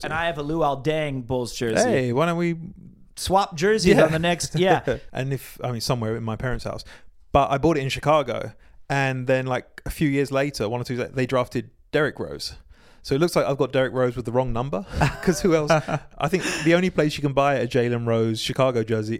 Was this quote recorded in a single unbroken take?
no; 1 cut; at 5.1 s

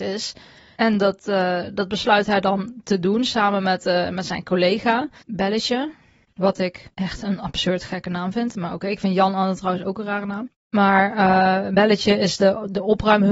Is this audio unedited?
yes; 0 cuts

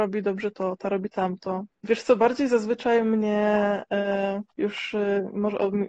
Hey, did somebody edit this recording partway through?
yes; 2 cuts; at 1.8 s, 4.5 s

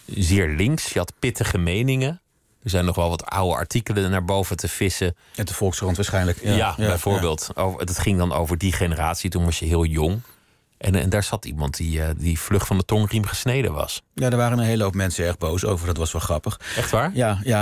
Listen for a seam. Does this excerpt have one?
no; 0 cuts

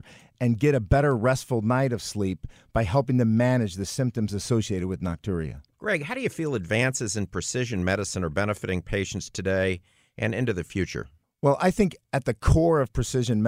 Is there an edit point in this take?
no; 0 cuts

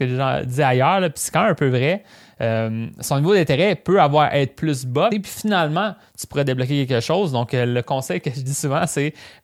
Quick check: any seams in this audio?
yes; 1 cut; at 5.1 s

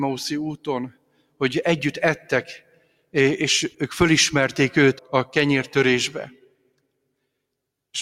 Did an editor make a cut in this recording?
yes; 2 cuts; at 3.7 s, 5.0 s

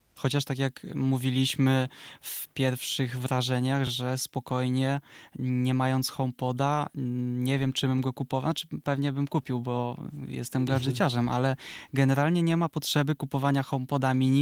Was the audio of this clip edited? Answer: no; 0 cuts

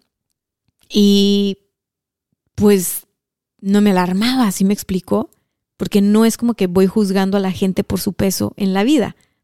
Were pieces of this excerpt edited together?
no; 0 cuts

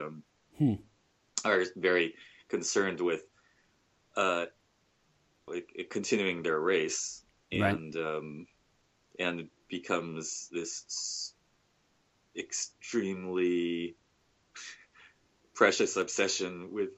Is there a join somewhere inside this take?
yes; 1 cut; at 5.5 s

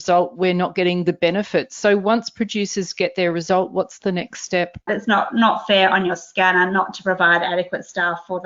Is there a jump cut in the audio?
yes; 1 cut; at 4.9 s

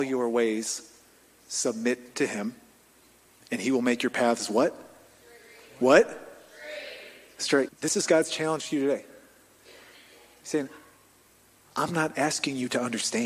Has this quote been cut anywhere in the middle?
yes; 1 cut; at 7.7 s

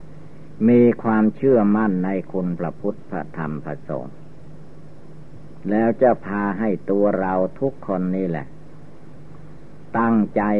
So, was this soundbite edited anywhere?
no; 0 cuts

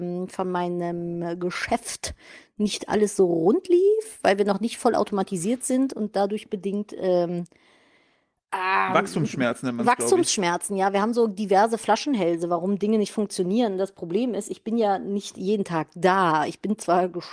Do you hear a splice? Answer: no; 0 cuts

